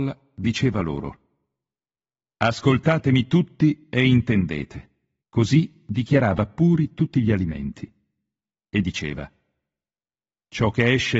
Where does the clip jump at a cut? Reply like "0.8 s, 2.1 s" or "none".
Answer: 5.2 s